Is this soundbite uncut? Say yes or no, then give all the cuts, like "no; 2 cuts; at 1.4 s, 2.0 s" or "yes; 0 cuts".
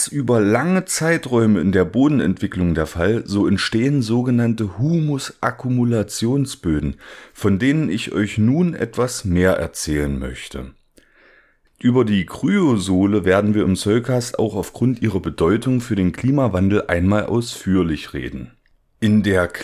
no; 1 cut; at 11.7 s